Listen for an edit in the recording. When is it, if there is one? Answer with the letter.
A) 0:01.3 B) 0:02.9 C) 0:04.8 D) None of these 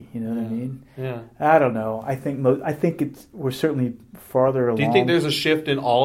D